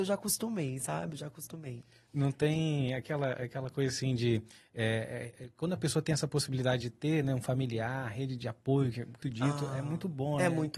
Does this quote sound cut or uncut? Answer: cut